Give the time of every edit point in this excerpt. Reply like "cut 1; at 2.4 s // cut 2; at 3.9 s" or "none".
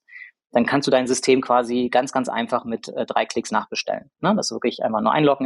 none